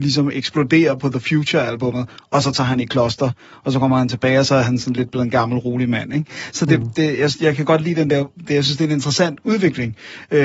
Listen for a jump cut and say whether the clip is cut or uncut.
uncut